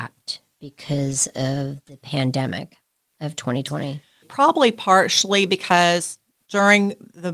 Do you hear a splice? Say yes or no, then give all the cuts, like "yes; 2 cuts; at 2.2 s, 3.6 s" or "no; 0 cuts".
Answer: yes; 1 cut; at 4.2 s